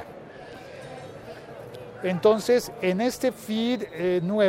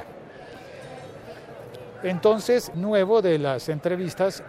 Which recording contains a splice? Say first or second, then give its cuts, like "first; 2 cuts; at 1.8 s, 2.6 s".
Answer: second; 1 cut; at 2.7 s